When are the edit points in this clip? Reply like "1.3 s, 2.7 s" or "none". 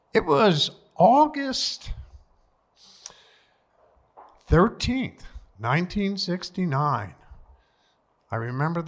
none